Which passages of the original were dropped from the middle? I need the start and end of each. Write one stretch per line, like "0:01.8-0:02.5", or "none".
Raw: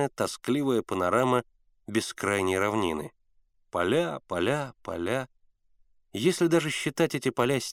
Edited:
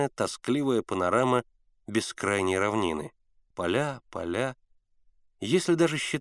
0:03.5-0:04.2